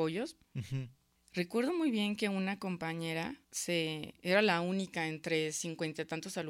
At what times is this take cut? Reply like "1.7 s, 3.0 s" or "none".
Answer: 1.2 s, 3.4 s

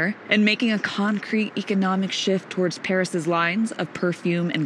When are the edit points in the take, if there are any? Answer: none

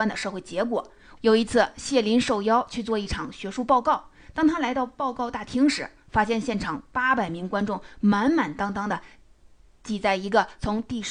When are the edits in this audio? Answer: 1.2 s

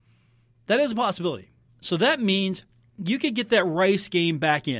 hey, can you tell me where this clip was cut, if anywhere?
1.7 s

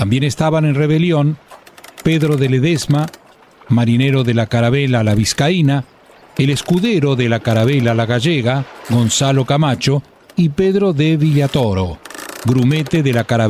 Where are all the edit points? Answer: none

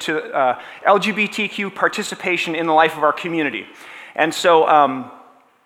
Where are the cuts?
none

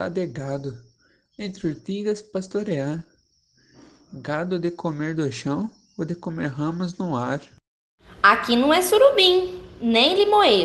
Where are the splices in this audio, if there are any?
none

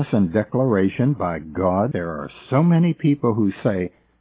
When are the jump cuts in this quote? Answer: 1.9 s

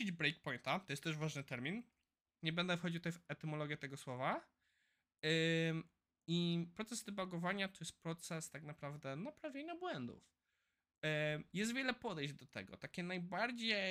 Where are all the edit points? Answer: 2.4 s

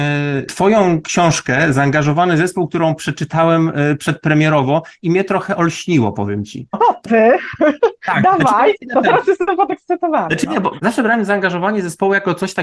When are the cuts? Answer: 6.7 s

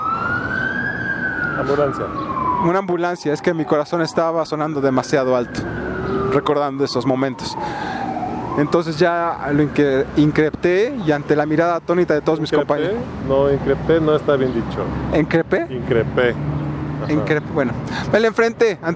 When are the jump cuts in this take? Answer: 13.2 s

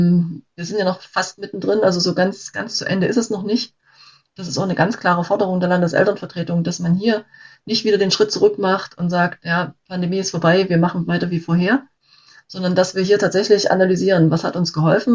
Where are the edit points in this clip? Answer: 4.3 s

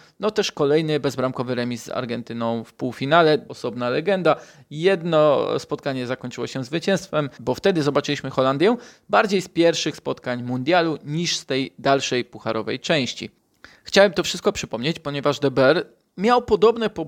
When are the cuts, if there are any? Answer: 3.5 s, 7.4 s

